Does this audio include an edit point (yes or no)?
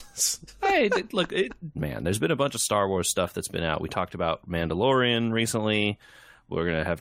yes